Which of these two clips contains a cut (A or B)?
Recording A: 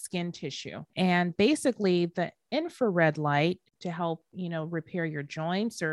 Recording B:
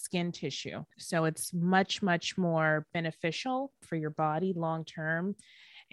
A